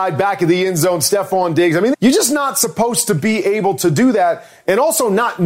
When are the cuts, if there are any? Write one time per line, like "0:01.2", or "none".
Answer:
0:01.9